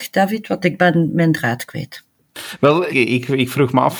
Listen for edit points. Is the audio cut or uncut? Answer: cut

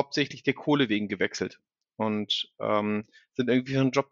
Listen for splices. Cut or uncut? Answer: uncut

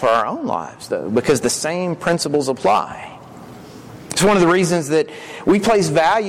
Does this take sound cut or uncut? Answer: uncut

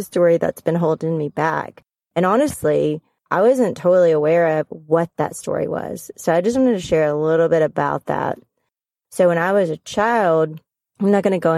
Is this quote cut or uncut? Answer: uncut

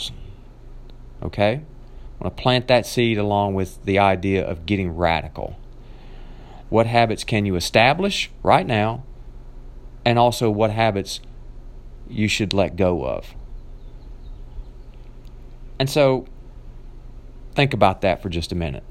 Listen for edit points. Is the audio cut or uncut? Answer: cut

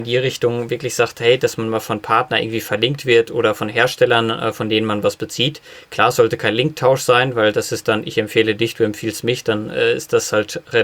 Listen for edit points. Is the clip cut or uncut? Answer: uncut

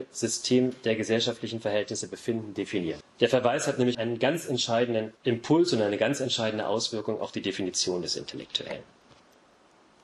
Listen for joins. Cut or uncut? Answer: cut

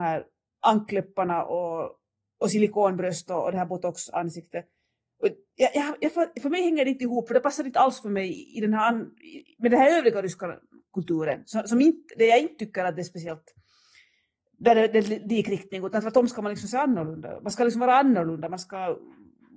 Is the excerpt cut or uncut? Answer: uncut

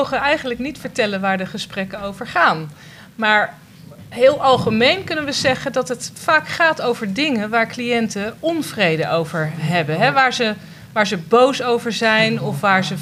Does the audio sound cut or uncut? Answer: uncut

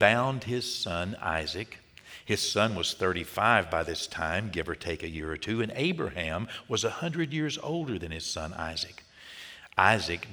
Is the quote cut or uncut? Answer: uncut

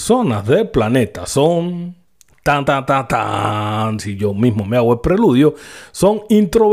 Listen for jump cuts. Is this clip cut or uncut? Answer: uncut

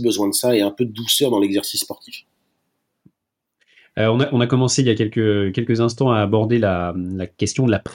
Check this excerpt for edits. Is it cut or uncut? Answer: uncut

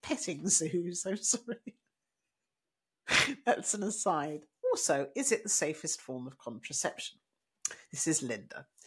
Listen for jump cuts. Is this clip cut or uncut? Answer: cut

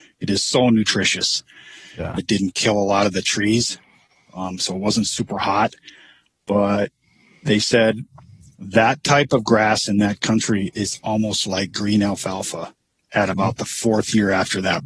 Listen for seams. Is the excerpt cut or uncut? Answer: cut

